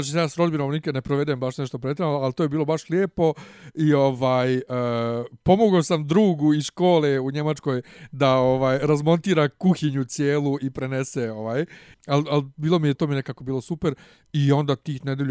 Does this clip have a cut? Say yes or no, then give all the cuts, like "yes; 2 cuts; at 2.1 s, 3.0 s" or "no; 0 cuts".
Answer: yes; 2 cuts; at 11.9 s, 12.9 s